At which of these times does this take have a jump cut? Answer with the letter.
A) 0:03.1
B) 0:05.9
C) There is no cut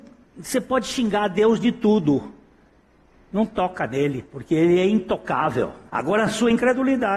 B